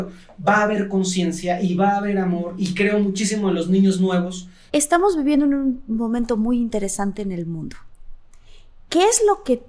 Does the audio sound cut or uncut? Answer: cut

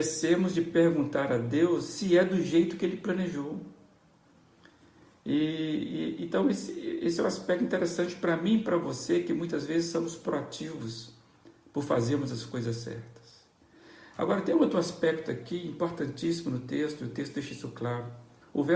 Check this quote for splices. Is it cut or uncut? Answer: uncut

